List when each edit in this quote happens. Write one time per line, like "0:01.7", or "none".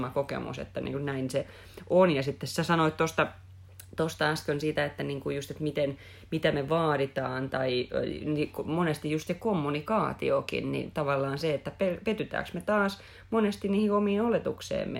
none